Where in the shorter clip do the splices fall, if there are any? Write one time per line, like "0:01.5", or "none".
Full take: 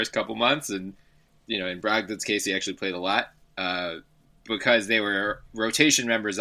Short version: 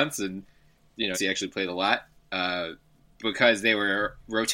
0:01.1